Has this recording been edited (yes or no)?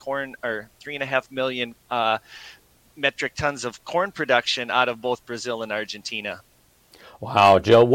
no